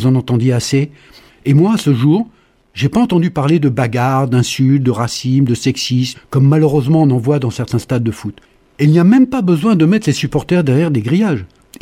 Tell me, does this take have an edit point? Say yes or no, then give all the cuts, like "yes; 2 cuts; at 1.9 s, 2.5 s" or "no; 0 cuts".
yes; 2 cuts; at 1.3 s, 6.1 s